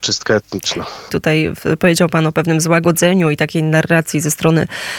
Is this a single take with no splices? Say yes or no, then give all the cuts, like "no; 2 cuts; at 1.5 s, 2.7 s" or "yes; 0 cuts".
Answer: no; 1 cut; at 1.1 s